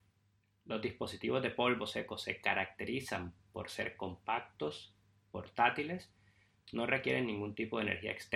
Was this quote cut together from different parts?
no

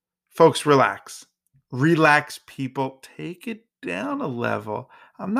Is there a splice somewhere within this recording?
no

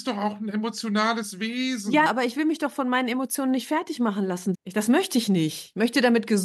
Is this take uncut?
no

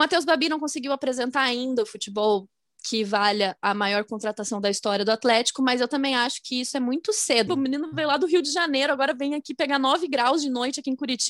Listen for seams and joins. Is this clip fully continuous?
no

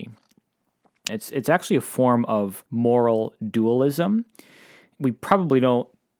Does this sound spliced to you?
yes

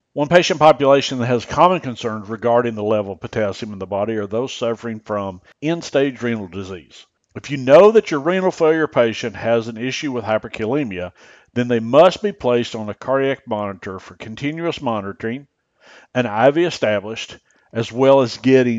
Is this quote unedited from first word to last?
no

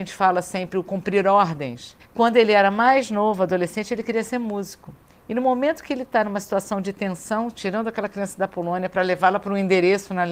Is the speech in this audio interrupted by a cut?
yes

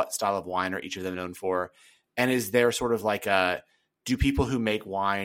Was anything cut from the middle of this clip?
no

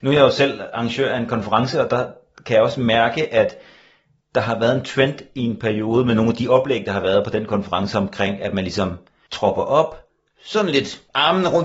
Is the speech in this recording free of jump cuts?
yes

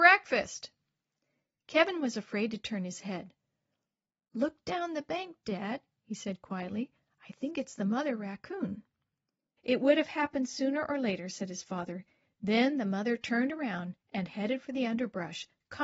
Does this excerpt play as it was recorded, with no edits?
no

